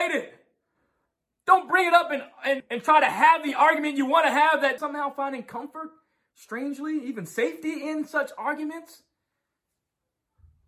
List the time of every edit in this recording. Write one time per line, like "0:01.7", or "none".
0:02.6
0:04.8